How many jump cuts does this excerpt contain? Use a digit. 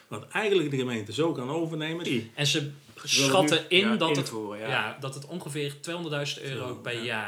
1